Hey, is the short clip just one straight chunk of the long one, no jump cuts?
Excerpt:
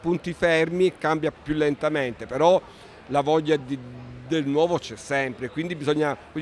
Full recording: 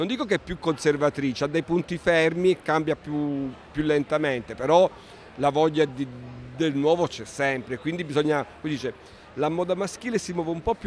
no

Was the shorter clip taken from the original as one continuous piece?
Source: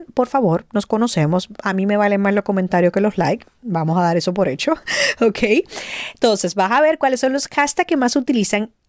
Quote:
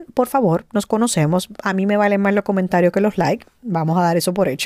yes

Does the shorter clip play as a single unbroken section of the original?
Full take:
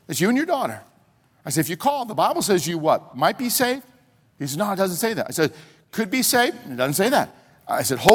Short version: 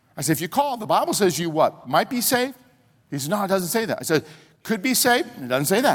yes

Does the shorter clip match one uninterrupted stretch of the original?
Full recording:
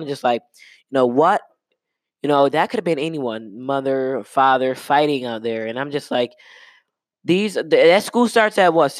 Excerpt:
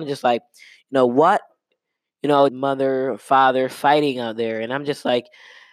no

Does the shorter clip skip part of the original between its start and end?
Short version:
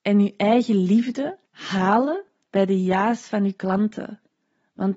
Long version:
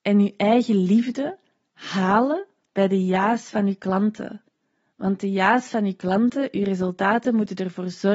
yes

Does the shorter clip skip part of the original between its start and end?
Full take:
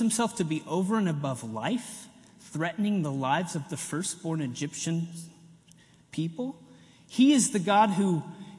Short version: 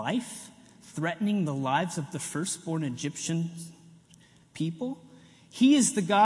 no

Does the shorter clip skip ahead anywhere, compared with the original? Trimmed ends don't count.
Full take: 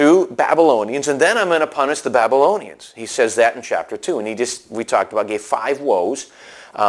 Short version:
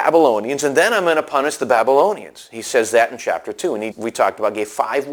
yes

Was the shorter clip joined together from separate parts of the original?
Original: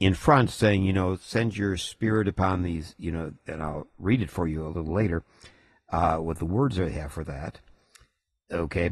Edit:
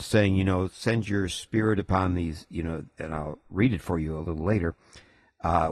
no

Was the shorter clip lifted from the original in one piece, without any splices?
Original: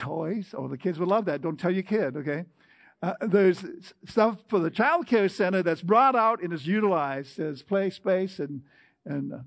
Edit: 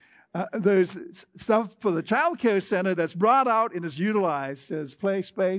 yes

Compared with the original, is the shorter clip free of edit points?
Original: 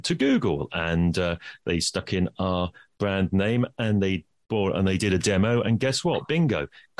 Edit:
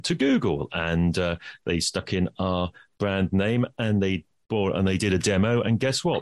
yes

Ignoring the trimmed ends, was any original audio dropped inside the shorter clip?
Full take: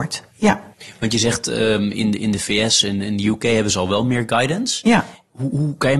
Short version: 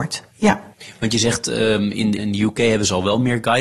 yes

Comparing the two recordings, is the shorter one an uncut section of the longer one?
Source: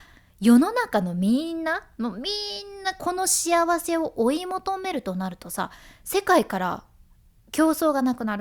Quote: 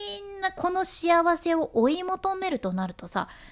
yes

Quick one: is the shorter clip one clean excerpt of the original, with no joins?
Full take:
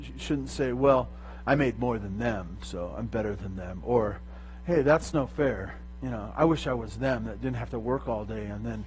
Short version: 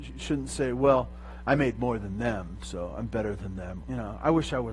no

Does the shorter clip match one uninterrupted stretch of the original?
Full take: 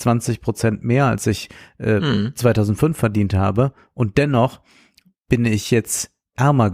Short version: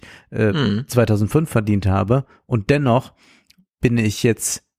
yes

